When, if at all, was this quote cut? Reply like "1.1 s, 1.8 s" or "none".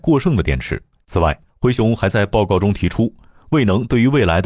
1.0 s

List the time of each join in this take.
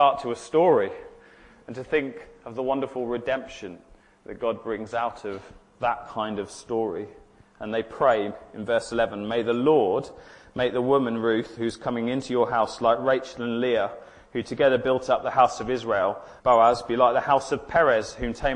16.4 s

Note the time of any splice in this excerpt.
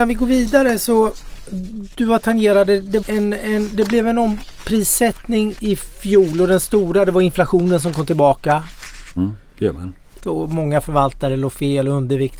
3.0 s, 9.2 s, 10.2 s

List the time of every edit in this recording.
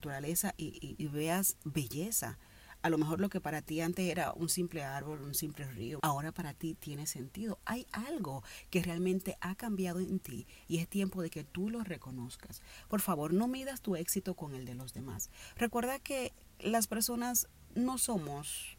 6.0 s

